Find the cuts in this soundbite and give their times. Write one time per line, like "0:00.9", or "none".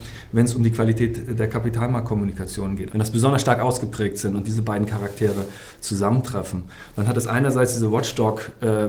0:02.9